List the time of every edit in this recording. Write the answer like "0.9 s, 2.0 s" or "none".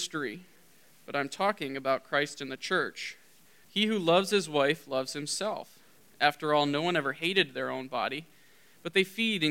3.6 s